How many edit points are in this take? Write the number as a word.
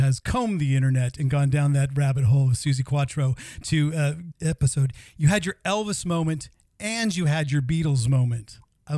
one